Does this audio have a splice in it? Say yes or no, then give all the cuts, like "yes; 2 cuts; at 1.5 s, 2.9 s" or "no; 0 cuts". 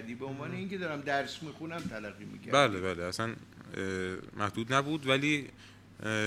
no; 0 cuts